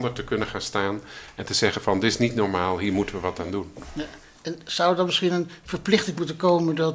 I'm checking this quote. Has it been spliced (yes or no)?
no